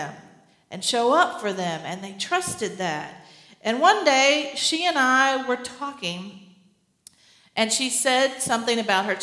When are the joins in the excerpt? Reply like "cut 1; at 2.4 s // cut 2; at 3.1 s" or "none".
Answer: none